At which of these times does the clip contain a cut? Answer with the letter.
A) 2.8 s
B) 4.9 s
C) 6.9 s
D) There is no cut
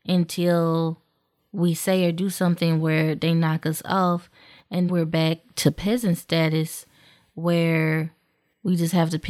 B